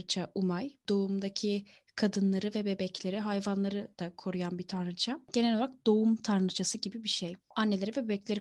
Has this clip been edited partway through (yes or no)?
no